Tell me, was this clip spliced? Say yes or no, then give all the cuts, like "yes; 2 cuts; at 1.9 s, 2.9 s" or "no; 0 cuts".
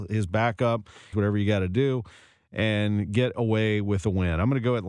yes; 1 cut; at 1.1 s